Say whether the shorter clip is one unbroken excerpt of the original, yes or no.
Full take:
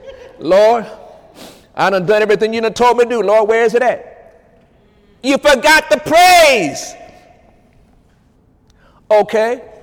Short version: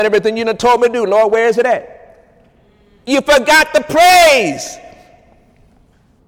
yes